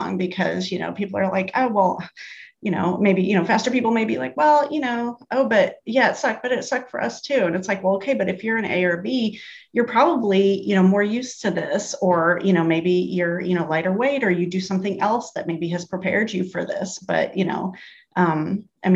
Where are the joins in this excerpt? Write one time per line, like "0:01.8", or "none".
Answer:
none